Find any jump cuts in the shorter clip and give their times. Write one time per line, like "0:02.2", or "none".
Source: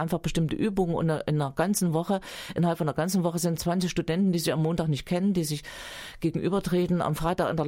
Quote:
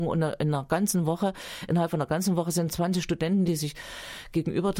0:03.5